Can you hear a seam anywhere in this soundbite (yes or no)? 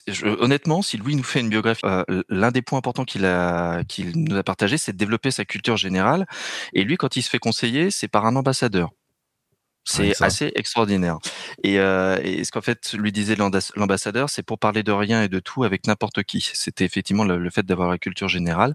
yes